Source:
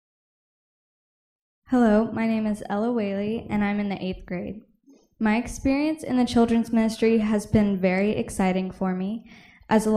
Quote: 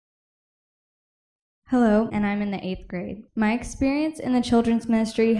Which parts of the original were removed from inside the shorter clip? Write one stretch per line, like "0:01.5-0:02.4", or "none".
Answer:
0:02.1-0:03.5
0:04.7-0:05.1